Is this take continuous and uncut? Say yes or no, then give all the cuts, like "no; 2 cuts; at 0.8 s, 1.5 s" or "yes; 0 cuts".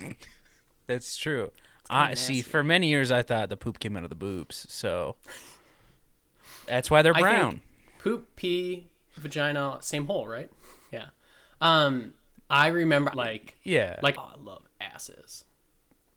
no; 3 cuts; at 10.9 s, 13.1 s, 14.1 s